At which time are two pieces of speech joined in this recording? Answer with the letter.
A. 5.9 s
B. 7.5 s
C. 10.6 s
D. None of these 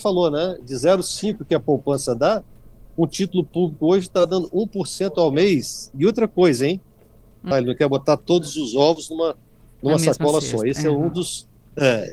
B